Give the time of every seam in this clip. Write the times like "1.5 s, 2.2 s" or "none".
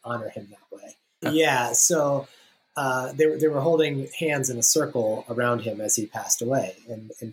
1.2 s